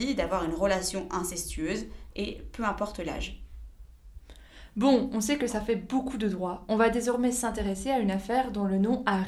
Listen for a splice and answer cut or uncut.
cut